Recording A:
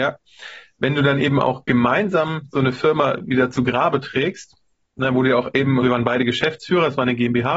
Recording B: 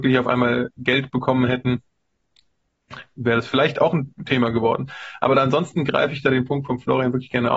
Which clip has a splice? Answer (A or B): A